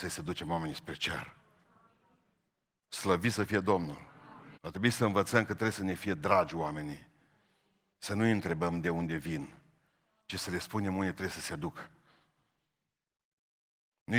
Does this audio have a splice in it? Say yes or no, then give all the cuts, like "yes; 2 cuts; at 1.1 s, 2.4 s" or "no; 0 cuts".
yes; 2 cuts; at 2.9 s, 4.5 s